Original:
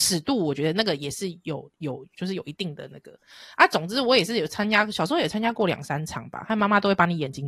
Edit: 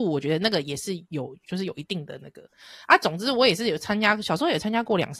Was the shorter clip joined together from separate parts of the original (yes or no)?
yes